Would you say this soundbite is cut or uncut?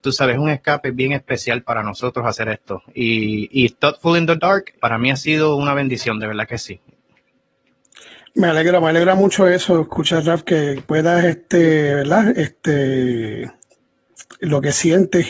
cut